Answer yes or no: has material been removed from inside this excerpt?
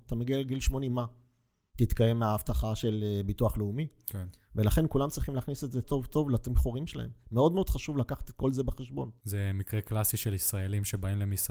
yes